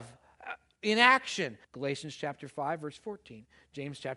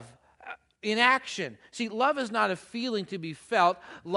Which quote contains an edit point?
first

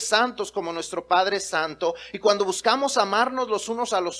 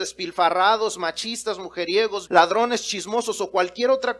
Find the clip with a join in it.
second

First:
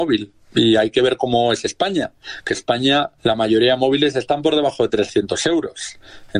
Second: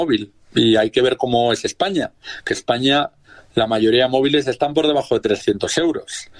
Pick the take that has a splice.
first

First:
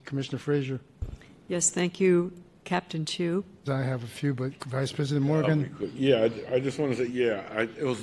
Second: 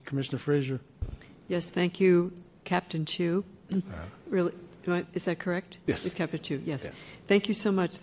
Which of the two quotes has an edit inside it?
first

